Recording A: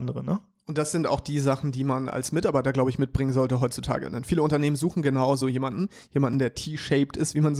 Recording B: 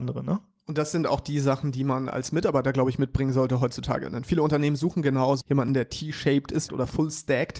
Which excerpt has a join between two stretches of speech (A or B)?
B